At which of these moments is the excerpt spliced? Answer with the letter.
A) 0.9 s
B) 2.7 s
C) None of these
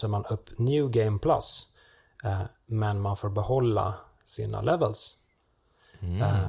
B